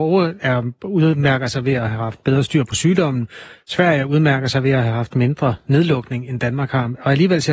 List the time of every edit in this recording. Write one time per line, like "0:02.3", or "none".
none